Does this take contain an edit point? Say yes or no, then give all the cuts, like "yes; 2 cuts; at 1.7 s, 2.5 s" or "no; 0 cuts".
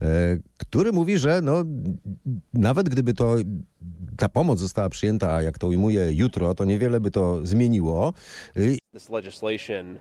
yes; 1 cut; at 8.8 s